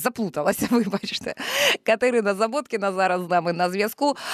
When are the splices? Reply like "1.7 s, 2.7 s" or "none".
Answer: none